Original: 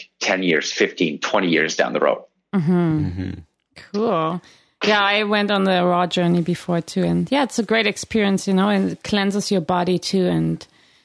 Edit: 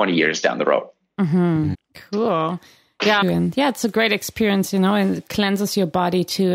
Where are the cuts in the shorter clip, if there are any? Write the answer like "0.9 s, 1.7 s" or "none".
1.7 s, 3.2 s